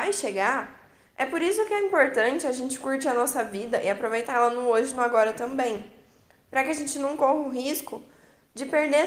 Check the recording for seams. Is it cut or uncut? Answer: cut